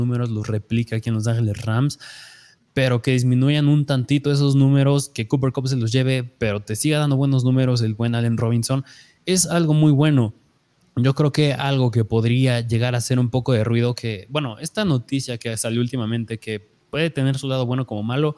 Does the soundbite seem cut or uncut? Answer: uncut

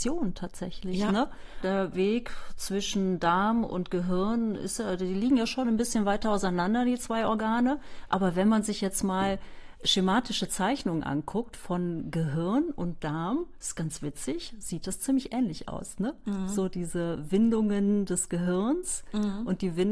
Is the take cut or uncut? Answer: cut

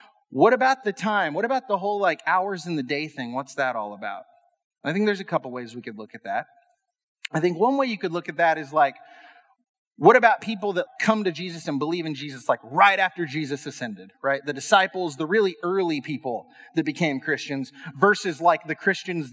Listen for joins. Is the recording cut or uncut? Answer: cut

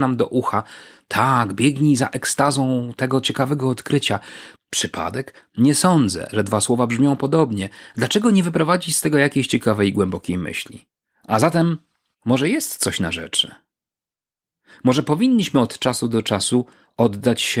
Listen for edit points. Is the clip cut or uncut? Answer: cut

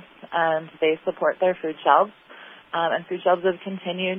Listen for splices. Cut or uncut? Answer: uncut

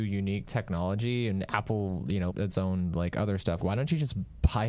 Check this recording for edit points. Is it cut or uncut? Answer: cut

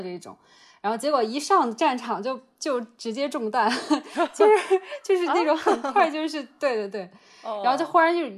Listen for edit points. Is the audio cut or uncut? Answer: uncut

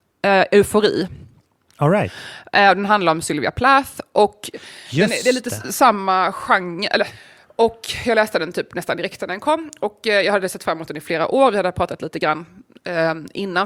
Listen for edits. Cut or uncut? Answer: uncut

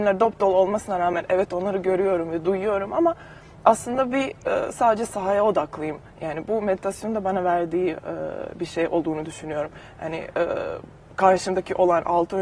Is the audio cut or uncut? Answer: uncut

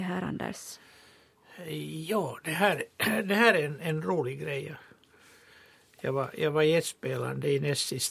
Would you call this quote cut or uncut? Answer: uncut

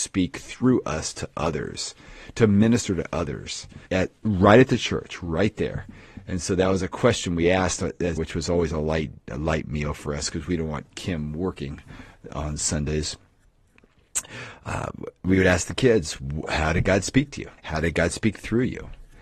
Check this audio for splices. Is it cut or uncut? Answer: cut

